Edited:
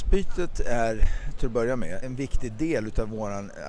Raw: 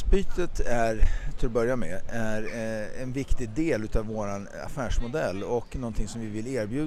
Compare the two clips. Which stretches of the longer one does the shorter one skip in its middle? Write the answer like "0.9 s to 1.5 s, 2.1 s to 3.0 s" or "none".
2.0 s to 3.0 s